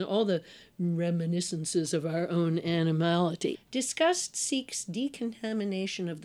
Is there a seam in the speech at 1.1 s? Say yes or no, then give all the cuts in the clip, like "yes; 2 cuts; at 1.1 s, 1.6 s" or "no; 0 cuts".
no; 1 cut; at 3.5 s